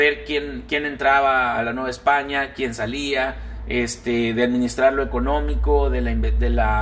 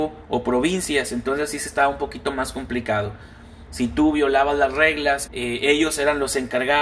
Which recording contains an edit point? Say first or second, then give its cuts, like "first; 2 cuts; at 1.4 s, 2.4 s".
second; 2 cuts; at 3.7 s, 5.3 s